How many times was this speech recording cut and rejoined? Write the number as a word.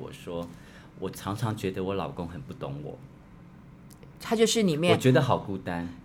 zero